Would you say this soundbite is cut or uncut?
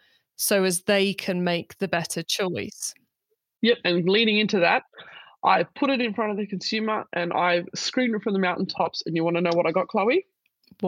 uncut